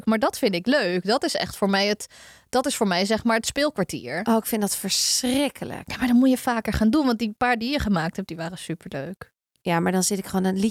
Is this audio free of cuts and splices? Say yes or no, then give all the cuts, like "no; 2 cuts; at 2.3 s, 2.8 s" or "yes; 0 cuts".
yes; 0 cuts